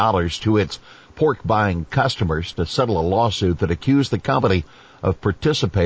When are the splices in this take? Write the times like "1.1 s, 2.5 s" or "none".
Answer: none